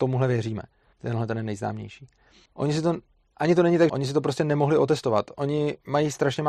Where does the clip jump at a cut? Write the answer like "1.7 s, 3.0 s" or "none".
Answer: 0.9 s, 2.5 s, 3.9 s